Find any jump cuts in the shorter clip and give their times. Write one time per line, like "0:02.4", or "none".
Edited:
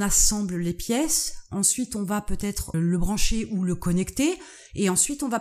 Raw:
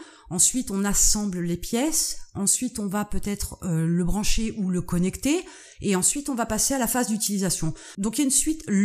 0:02.7